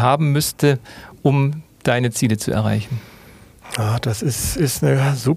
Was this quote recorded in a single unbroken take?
yes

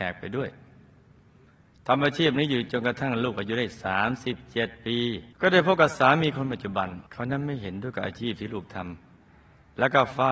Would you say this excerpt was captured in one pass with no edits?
no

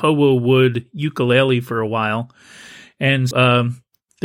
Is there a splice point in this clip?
yes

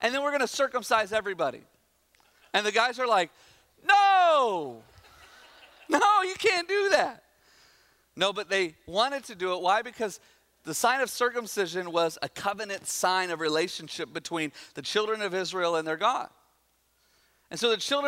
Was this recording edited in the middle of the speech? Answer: no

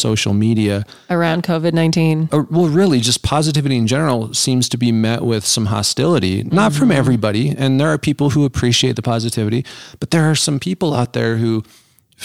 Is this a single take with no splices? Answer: yes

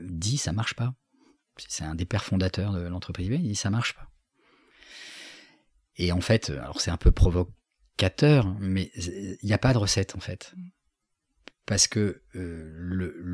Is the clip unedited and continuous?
yes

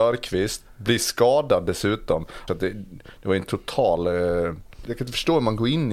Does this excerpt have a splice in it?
yes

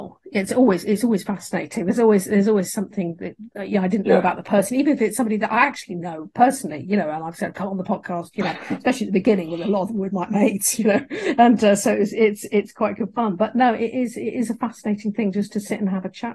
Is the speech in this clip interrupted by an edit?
no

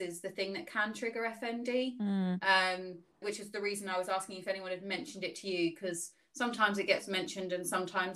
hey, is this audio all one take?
no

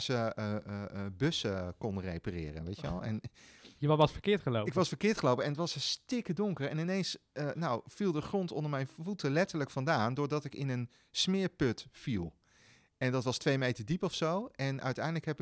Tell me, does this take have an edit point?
no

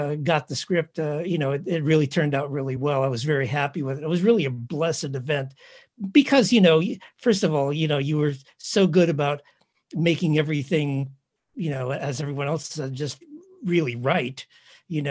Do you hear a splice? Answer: no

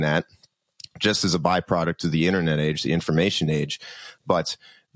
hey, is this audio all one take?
yes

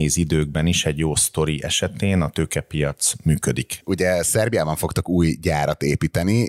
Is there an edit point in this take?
yes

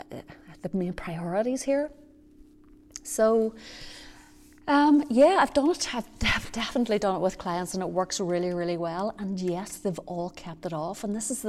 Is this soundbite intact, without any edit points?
yes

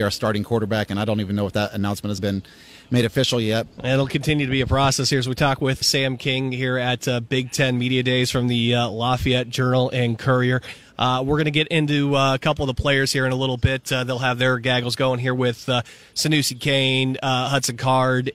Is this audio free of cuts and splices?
no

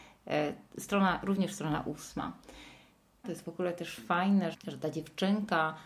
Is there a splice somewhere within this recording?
yes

